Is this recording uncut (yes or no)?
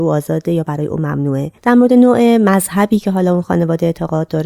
no